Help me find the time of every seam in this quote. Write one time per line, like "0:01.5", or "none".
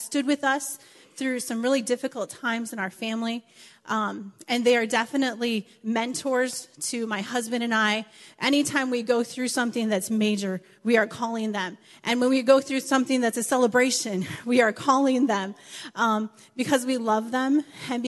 none